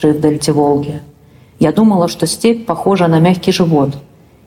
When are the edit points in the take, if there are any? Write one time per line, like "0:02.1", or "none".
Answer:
none